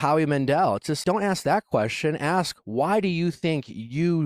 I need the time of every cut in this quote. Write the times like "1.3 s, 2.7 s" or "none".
1.0 s